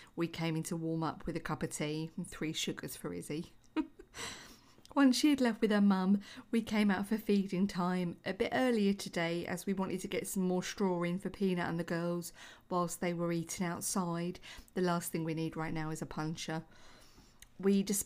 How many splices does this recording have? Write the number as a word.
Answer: one